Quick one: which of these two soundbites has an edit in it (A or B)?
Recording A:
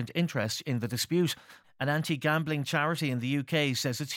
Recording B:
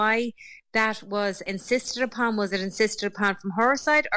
A